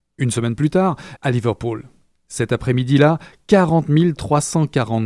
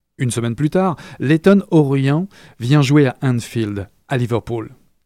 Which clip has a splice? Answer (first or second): first